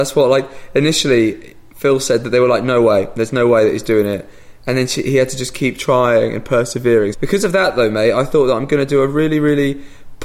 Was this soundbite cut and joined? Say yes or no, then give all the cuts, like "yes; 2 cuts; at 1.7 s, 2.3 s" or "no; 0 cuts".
yes; 1 cut; at 7.1 s